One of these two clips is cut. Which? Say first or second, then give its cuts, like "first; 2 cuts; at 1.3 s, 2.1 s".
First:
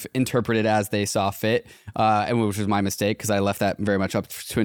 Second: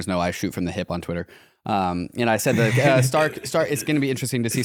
second; 1 cut; at 2.7 s